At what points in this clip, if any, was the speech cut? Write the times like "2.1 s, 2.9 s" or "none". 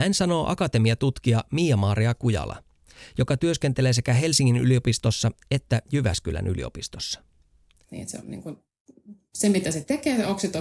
7.8 s